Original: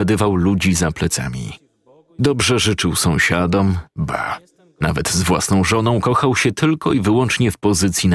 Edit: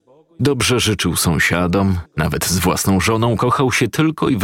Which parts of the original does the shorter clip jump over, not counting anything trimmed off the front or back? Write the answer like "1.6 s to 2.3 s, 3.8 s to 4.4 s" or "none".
3.8 s to 4.7 s